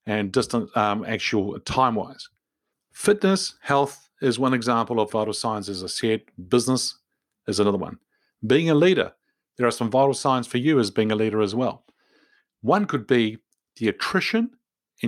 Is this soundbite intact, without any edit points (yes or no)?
no